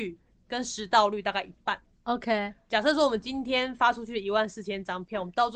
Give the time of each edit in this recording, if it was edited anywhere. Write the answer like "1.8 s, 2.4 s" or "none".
none